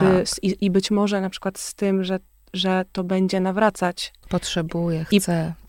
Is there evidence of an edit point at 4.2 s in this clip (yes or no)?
yes